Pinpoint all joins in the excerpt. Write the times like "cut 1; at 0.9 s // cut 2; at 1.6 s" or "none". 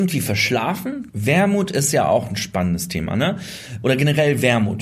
cut 1; at 1.1 s // cut 2; at 3.8 s